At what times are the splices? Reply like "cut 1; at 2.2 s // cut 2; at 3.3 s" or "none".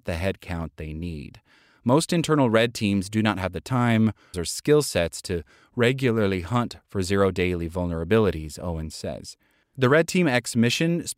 cut 1; at 4.3 s // cut 2; at 9.6 s